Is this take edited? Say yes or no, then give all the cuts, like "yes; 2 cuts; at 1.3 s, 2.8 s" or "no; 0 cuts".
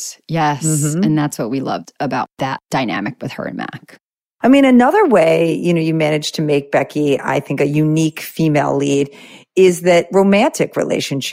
no; 0 cuts